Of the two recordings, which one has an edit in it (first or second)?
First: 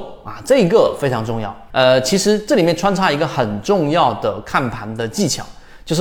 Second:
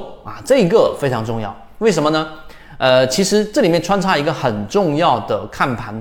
first